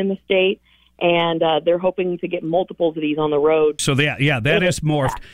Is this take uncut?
no; 1 cut; at 3.8 s

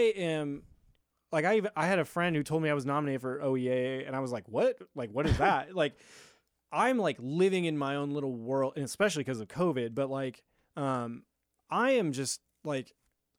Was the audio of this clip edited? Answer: no; 0 cuts

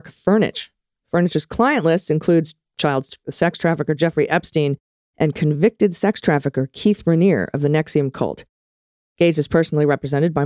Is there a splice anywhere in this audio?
yes; 2 cuts; at 5.0 s, 9.0 s

